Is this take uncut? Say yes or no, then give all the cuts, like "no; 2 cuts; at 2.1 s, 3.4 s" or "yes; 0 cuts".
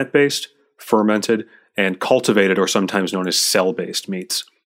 yes; 0 cuts